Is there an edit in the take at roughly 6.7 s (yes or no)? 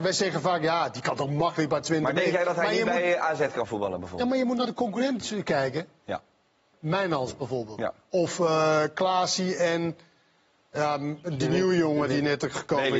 yes